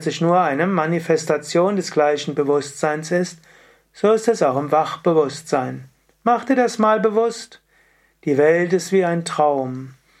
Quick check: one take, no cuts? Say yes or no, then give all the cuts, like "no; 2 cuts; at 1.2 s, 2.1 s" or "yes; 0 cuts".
yes; 0 cuts